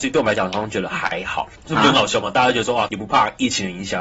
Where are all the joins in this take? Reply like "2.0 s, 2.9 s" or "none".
1.5 s, 2.9 s

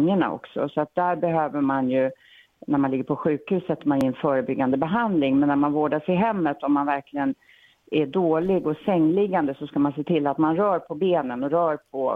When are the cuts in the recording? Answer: none

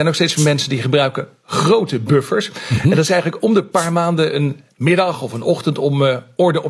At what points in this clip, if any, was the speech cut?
none

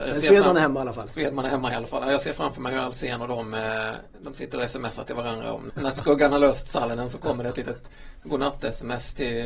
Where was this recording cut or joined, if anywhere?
5.7 s

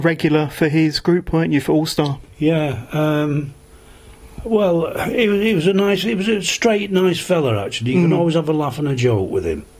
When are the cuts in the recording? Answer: none

